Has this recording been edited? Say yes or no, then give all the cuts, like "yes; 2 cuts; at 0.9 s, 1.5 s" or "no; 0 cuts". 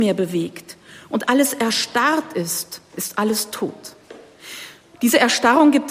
no; 0 cuts